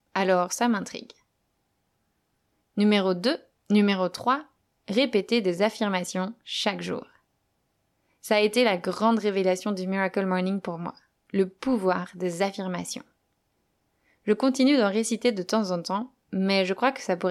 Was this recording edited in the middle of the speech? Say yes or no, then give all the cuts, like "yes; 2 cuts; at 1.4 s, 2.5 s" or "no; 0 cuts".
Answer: yes; 1 cut; at 3.6 s